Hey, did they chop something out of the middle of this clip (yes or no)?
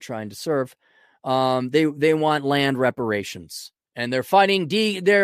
no